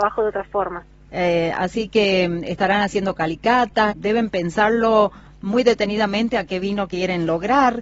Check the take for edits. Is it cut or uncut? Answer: cut